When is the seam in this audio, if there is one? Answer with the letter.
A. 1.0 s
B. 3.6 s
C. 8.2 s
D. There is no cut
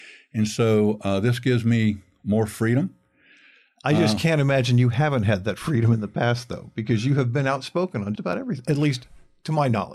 C